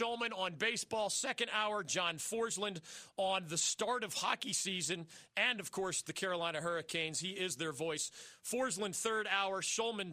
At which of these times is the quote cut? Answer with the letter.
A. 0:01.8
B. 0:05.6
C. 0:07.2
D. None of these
D